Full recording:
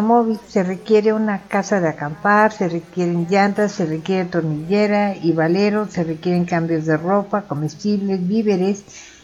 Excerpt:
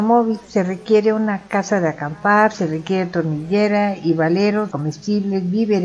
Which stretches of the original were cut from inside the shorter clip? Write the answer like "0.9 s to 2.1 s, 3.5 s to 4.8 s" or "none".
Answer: 2.5 s to 3.7 s, 5.9 s to 7.5 s